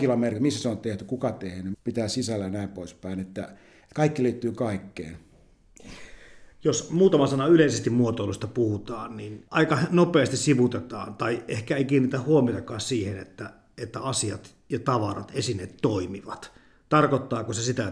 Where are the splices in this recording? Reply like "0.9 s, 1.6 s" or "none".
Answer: 1.7 s

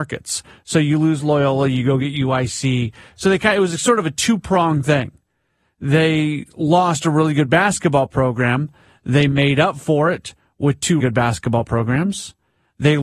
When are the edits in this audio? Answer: 11.0 s

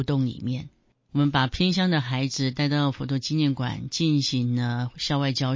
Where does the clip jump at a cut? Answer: 1.1 s

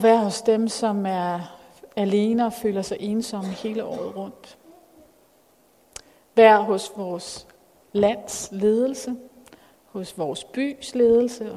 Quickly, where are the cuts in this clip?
none

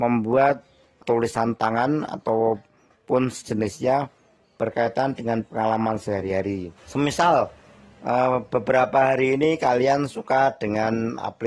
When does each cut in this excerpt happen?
1.0 s, 6.8 s

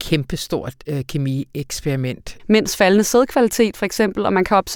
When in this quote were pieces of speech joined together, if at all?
2.4 s

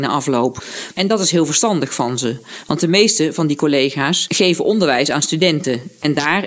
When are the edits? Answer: 0.9 s

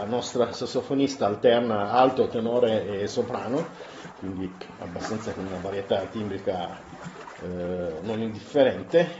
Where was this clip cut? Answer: none

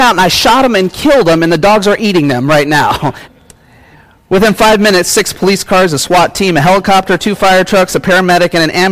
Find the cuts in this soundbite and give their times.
3.2 s

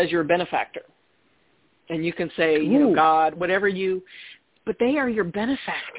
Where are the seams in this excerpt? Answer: 3.3 s

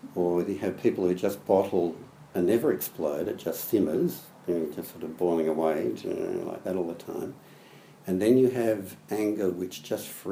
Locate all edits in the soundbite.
none

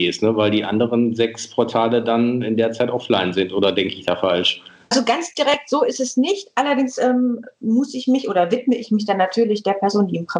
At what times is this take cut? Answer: none

